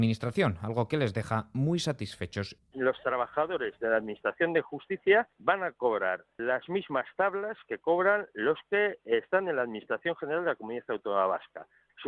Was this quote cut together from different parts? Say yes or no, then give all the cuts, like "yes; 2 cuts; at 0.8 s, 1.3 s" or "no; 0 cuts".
yes; 2 cuts; at 2.6 s, 6.4 s